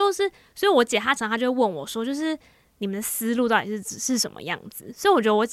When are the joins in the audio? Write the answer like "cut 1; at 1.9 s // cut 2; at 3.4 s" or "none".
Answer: cut 1; at 1.2 s